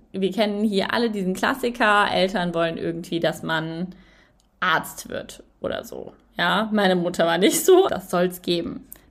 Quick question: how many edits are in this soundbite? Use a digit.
1